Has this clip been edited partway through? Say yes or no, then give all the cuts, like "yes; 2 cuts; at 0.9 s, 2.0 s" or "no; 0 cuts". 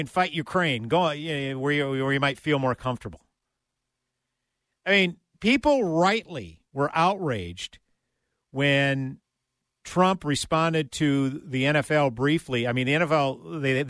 no; 0 cuts